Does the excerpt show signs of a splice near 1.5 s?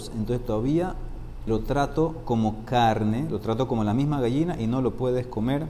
yes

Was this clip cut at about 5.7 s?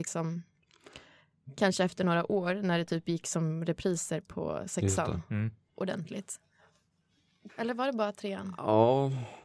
yes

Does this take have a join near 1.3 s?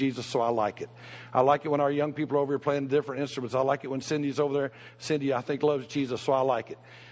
no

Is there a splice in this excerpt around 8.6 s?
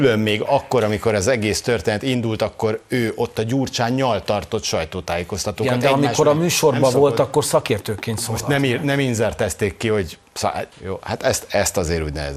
no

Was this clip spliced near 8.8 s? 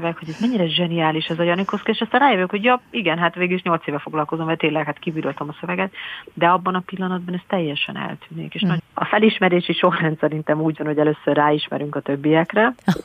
yes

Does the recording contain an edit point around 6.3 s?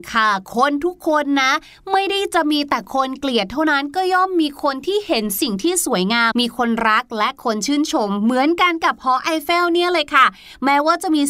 yes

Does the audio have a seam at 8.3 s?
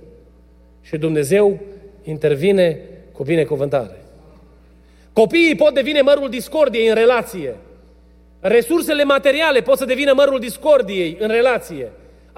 no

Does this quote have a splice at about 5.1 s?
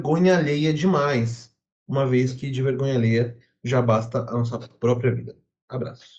no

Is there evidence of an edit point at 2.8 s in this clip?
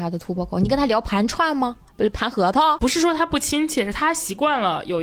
yes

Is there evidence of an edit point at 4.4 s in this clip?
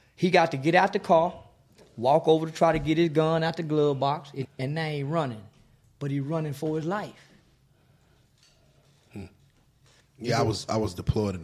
yes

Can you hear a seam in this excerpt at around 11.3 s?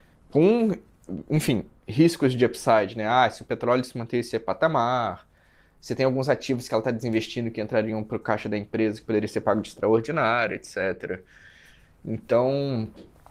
no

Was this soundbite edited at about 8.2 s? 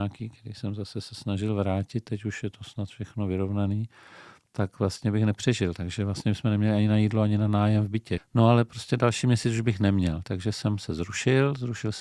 yes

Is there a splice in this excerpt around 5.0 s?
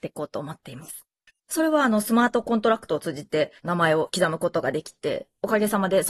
no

